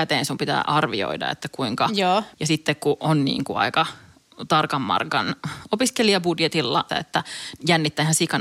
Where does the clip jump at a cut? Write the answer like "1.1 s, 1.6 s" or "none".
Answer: 2.3 s, 6.9 s